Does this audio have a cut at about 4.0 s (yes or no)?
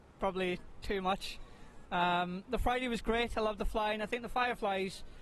no